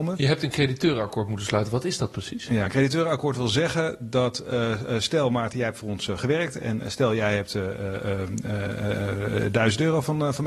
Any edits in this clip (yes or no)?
no